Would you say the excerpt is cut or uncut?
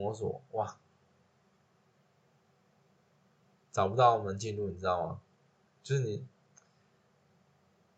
uncut